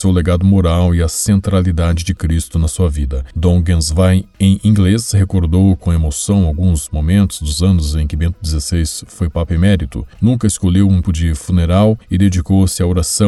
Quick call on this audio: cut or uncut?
cut